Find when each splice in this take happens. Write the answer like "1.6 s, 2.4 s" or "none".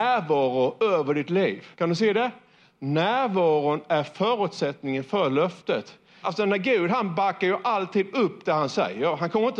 1.7 s, 6.2 s